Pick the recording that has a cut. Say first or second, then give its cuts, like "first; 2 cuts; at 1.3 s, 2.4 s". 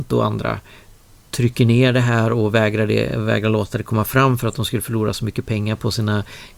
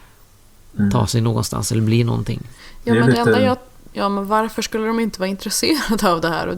second; 1 cut; at 3.9 s